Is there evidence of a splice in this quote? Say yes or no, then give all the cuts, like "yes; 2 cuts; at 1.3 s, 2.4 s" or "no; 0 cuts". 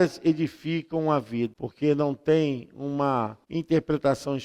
yes; 1 cut; at 1.5 s